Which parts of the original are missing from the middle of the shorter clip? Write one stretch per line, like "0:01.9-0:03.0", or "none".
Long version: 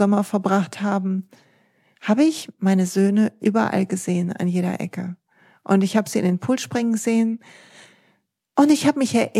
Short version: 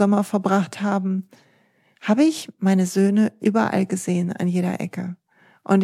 none